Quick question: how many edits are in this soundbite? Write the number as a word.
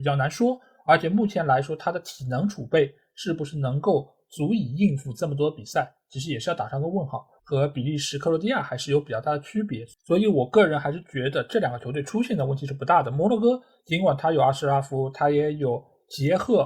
one